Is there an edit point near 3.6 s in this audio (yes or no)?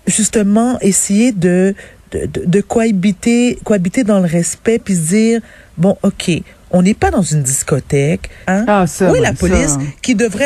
no